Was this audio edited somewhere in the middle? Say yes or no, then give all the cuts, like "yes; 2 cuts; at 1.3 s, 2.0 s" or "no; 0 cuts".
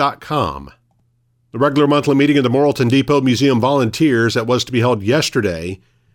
no; 0 cuts